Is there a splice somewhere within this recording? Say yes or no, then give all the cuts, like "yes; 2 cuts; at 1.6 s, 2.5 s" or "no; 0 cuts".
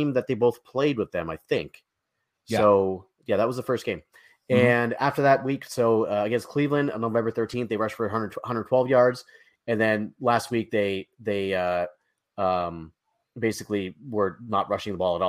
no; 0 cuts